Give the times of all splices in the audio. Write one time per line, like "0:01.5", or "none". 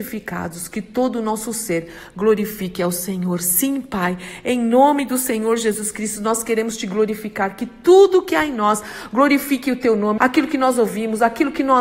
0:10.2